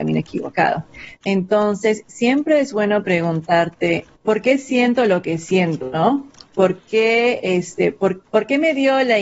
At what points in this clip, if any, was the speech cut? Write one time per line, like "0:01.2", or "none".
0:04.1
0:08.2